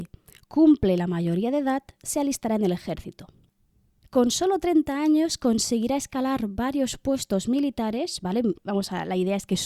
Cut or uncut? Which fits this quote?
cut